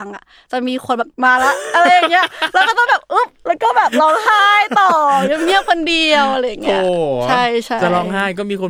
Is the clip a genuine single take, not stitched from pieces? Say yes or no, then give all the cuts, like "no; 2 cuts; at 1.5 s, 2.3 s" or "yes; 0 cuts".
no; 1 cut; at 1.1 s